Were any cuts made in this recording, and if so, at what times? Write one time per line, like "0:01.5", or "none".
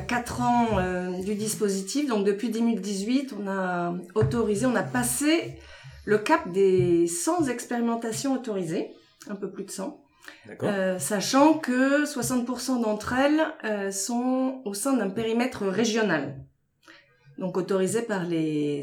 none